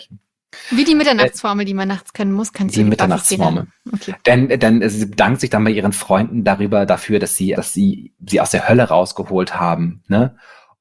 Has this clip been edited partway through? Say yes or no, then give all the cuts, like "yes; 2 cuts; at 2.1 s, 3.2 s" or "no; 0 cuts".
yes; 1 cut; at 7.5 s